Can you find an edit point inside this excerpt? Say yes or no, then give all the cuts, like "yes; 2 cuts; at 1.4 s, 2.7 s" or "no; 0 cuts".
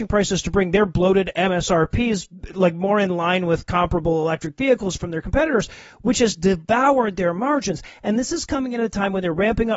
no; 0 cuts